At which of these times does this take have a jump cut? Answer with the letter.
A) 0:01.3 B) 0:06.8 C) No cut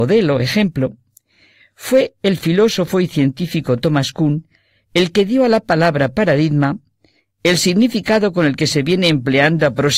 C